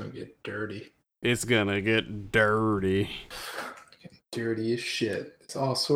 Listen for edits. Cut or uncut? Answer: uncut